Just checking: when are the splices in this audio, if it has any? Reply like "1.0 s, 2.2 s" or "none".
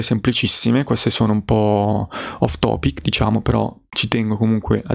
none